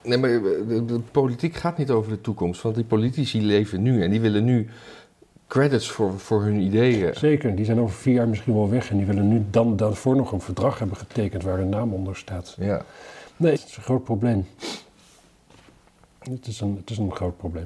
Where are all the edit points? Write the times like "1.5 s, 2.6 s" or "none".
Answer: 13.6 s